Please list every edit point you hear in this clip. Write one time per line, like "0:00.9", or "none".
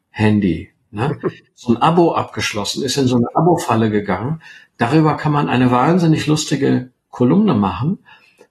none

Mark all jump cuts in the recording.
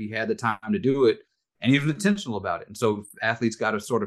none

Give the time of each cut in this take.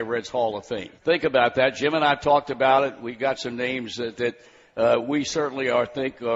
0:01.0

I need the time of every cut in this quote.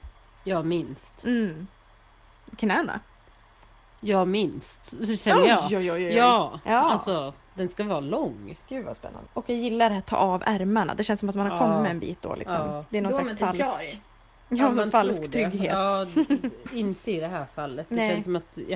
0:09.2

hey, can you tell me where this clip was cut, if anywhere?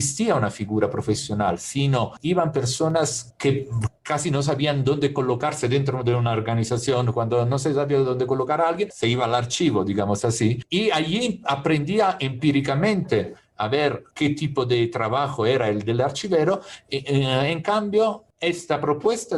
none

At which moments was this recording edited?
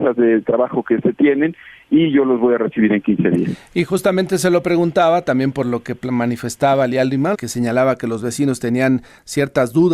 0:07.3

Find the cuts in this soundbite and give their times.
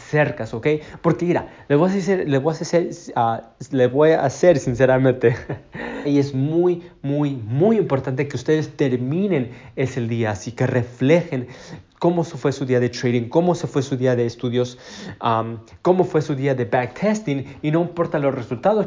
0:06.0

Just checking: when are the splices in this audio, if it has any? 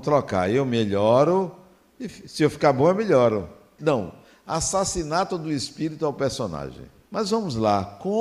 0:03.8
0:07.1

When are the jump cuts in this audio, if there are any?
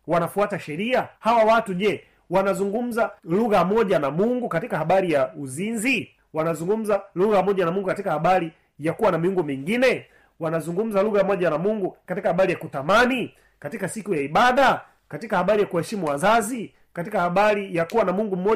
0:01.2
0:03.2

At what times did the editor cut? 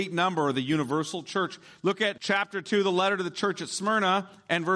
none

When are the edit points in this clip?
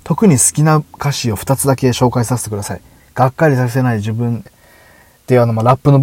0:03.0
0:04.5

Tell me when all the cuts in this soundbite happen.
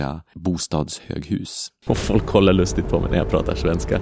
0:01.9

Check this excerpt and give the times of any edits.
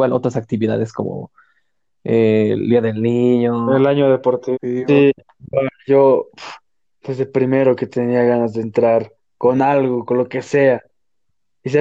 0:04.5

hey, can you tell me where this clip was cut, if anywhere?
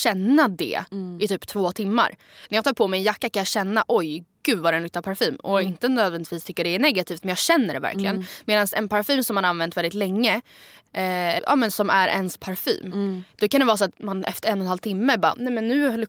0:11.4

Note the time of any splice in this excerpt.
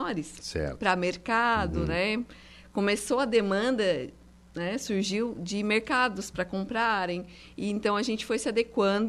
none

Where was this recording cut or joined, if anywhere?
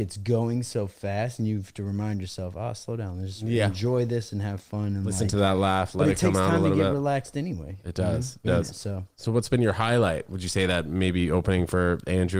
0:08.4

